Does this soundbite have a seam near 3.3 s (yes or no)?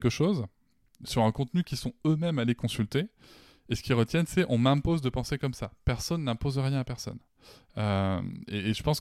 no